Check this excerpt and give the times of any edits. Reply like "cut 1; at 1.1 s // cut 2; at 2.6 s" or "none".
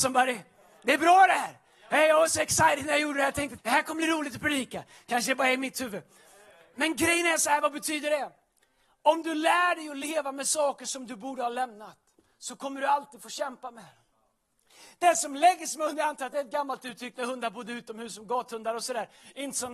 cut 1; at 3.6 s